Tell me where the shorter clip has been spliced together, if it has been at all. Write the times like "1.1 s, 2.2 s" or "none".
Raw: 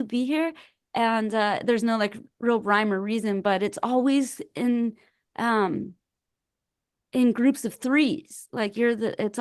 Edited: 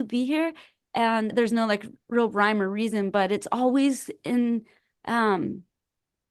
1.3 s